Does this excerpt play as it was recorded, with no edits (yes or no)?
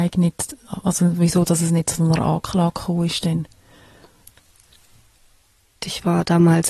no